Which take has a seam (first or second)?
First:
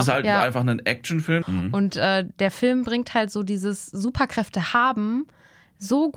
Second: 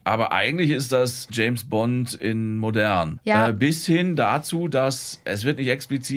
first